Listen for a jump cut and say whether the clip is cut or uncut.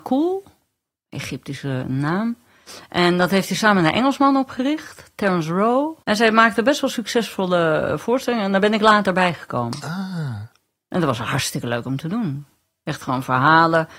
cut